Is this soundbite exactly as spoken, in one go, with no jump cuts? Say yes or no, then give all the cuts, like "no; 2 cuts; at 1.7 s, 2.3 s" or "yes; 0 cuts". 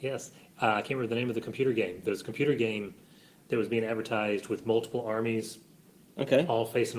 yes; 0 cuts